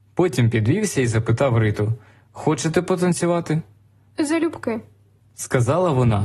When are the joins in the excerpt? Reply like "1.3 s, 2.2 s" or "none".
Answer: 4.1 s